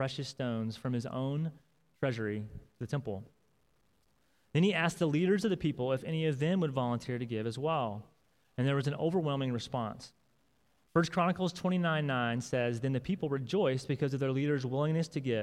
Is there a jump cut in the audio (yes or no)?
no